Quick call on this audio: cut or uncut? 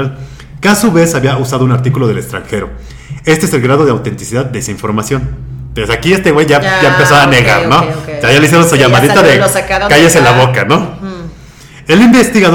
uncut